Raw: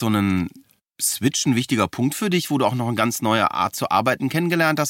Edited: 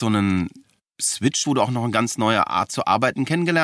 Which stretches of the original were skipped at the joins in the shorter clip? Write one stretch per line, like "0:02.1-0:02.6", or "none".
0:01.4-0:02.5